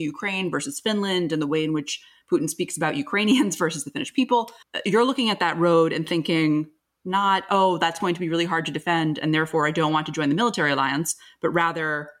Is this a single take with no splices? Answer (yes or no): yes